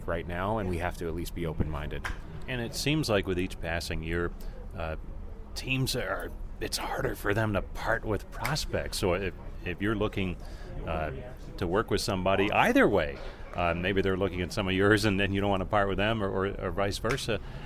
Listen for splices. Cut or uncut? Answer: uncut